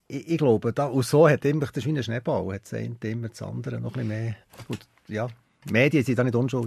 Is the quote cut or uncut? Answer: uncut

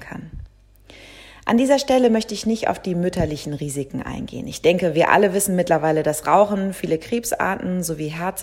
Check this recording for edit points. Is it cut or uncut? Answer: uncut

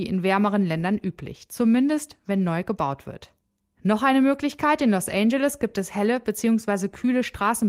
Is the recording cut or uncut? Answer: uncut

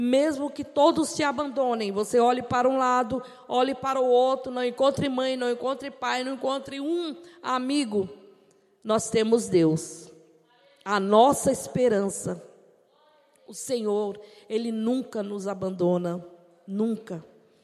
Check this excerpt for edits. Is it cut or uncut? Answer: uncut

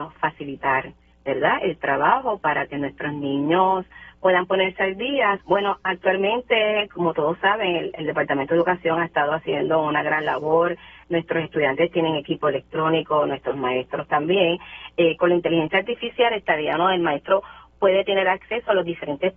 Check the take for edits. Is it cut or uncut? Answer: cut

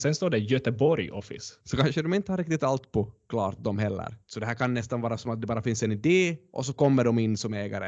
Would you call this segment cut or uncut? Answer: cut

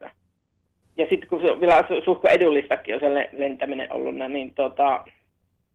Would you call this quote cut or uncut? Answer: uncut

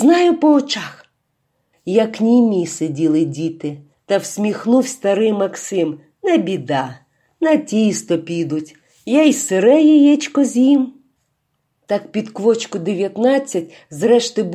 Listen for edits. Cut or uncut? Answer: uncut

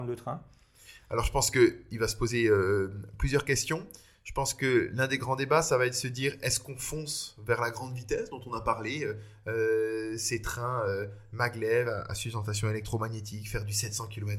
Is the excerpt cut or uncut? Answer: uncut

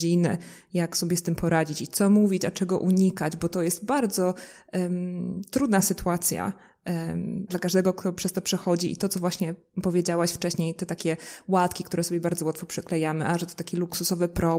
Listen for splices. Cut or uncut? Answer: cut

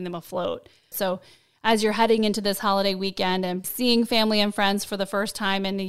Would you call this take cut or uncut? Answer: cut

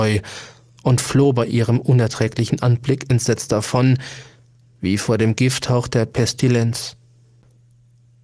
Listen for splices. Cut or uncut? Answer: uncut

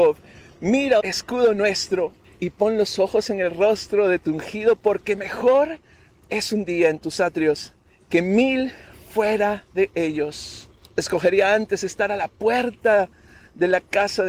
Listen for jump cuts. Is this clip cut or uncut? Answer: cut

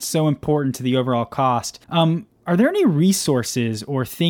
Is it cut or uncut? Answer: cut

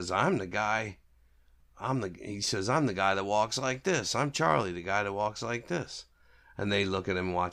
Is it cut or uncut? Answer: uncut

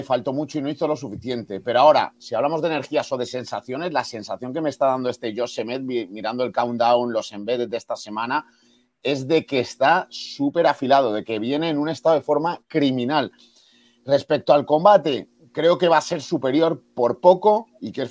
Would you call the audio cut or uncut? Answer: uncut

